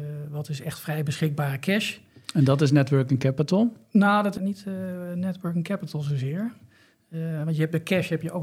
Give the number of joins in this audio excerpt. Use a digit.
1